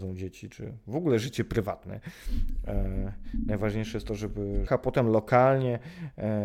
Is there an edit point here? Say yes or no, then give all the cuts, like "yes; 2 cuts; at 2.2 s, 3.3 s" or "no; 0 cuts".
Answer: yes; 1 cut; at 4.7 s